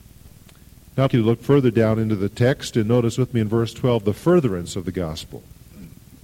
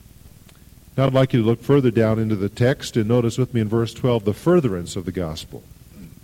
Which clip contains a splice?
first; 1 cut; at 1.1 s

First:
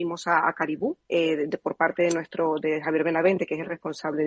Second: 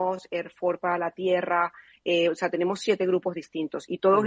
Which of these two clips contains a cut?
first; 1 cut; at 1.0 s

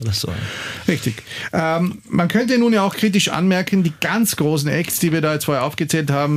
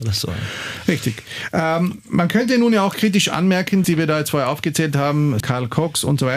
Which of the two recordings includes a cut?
second; 2 cuts; at 3.8 s, 5.4 s

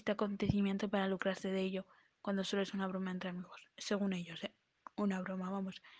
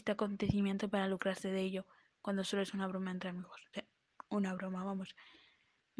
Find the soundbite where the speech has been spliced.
second; 1 cut; at 3.7 s

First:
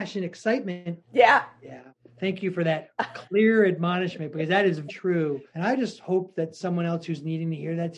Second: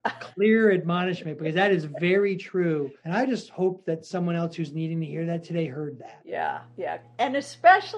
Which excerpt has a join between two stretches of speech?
first; 2 cuts; at 1.1 s, 4.9 s

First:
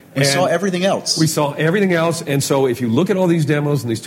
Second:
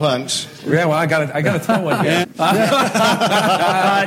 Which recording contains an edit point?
second; 1 cut; at 2.2 s

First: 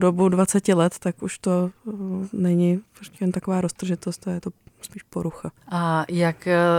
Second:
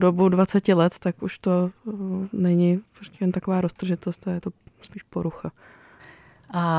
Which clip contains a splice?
first; 1 cut; at 5.6 s

